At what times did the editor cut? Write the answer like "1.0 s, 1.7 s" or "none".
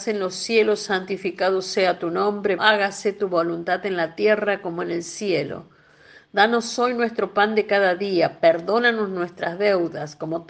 2.6 s